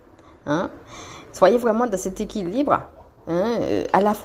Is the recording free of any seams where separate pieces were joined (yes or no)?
yes